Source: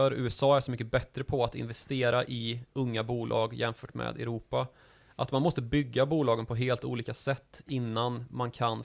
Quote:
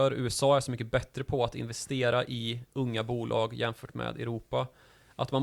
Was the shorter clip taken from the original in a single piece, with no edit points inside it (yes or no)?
yes